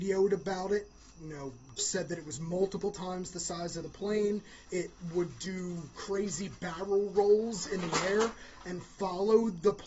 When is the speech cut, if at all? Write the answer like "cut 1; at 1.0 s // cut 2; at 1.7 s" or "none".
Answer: cut 1; at 1.8 s // cut 2; at 4.6 s